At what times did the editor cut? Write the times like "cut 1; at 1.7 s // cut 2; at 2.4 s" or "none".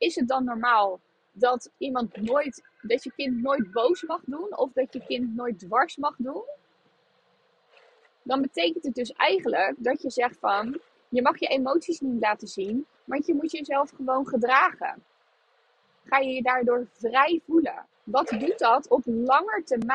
cut 1; at 16.0 s // cut 2; at 17.9 s